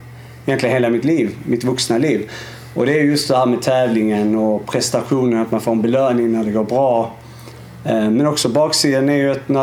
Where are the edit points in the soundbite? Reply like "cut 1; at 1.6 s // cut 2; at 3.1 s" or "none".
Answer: none